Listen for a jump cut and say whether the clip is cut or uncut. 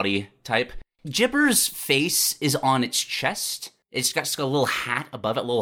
uncut